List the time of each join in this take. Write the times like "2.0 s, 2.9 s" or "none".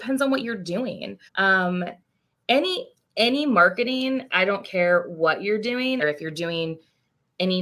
1.3 s, 6.0 s

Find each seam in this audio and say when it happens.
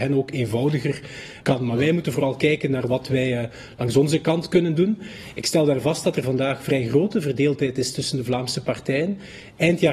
1.4 s

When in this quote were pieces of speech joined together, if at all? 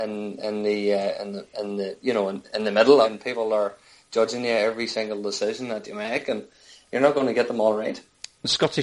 3.0 s

